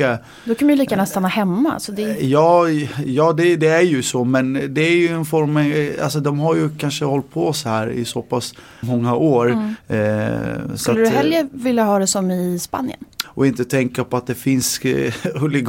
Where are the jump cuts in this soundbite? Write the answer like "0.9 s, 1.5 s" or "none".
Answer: 8.8 s, 13.2 s